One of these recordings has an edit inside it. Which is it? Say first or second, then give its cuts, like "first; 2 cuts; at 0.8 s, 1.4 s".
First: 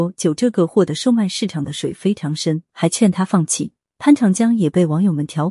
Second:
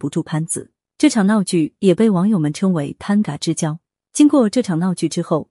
first; 2 cuts; at 2.7 s, 3.8 s